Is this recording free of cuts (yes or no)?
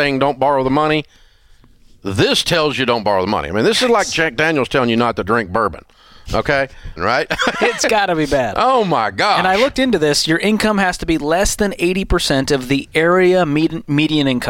no